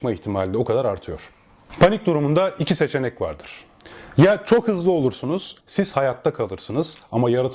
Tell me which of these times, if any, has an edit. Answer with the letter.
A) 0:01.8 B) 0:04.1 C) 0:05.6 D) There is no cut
C